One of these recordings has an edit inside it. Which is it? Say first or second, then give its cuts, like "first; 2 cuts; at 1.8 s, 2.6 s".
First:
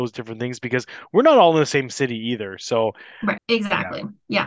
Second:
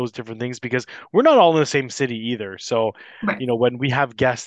first; 1 cut; at 3.4 s